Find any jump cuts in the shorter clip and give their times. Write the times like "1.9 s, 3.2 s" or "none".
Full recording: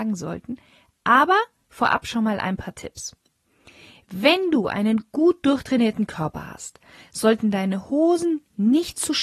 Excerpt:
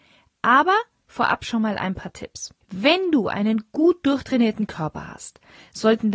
2.6 s